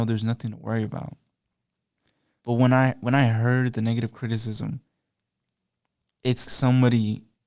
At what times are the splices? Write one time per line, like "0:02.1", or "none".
0:02.4
0:06.5